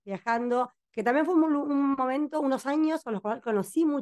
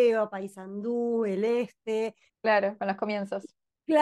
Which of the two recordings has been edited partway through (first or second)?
second